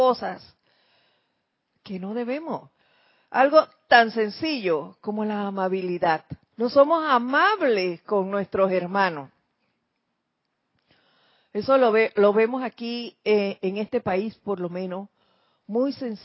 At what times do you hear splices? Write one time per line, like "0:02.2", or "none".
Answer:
0:06.4